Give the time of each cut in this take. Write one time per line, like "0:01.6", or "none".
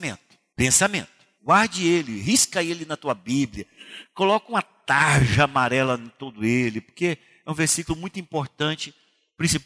0:01.4